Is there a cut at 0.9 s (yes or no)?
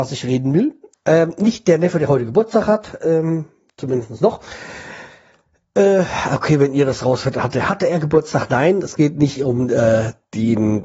yes